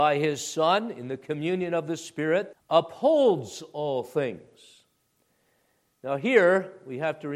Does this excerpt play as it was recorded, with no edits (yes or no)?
no